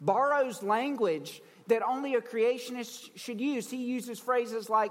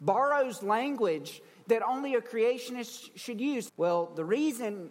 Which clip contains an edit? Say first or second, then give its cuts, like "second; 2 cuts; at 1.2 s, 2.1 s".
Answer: second; 1 cut; at 3.7 s